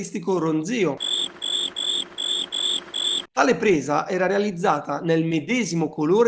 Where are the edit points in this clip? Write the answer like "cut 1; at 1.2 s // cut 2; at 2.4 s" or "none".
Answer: cut 1; at 3.3 s